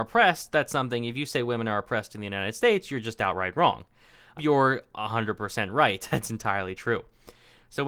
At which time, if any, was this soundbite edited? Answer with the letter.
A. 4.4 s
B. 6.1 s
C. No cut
A